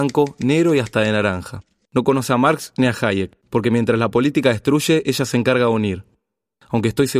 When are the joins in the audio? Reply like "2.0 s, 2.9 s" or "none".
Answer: 1.9 s, 3.4 s